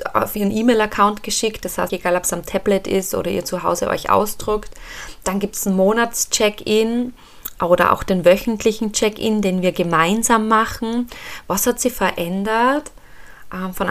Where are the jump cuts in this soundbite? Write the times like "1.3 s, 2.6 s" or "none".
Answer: 1.9 s